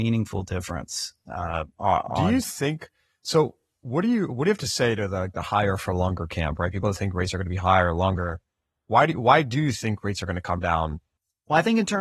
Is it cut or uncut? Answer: uncut